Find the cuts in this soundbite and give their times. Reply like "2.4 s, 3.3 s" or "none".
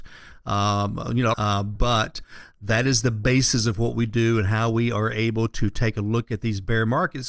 1.3 s